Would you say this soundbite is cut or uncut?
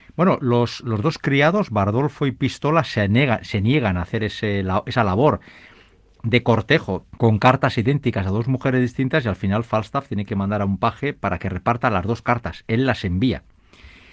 cut